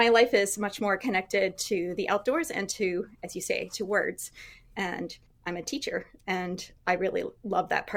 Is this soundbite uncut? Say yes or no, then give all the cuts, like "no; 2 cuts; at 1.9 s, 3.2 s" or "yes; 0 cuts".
yes; 0 cuts